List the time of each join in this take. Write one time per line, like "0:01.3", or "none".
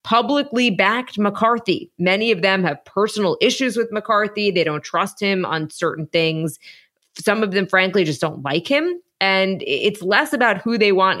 none